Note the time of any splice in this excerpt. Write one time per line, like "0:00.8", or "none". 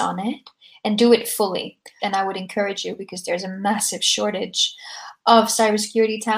0:02.0